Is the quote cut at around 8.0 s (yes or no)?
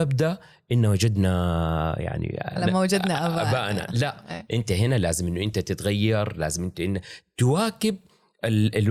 no